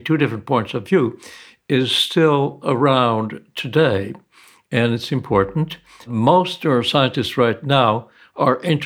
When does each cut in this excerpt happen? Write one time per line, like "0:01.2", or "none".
none